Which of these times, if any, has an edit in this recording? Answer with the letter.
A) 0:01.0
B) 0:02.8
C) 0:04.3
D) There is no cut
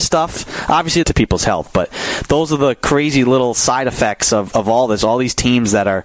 A